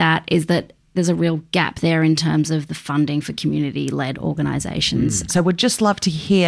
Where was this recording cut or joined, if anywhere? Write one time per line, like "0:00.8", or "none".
0:00.9
0:05.3